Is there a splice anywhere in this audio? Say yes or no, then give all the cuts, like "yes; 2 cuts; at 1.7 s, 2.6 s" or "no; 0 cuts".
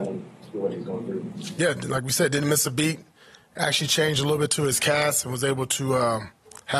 no; 0 cuts